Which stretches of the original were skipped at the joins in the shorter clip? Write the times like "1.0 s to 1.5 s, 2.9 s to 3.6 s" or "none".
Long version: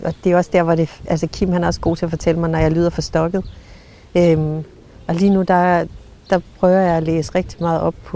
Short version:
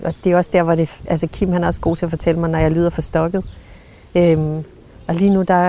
none